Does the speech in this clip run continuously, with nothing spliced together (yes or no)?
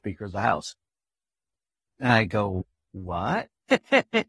yes